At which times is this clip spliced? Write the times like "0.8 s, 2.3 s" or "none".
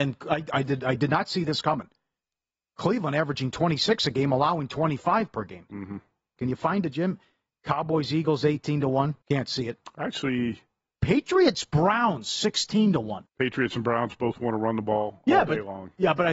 6.4 s, 9.2 s, 13.3 s

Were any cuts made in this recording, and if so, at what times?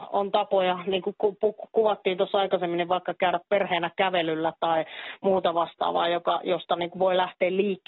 none

